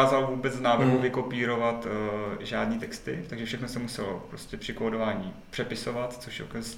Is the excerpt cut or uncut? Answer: uncut